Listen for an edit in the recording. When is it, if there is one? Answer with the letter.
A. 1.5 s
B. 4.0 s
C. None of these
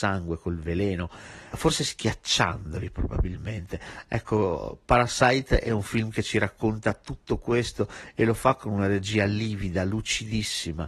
A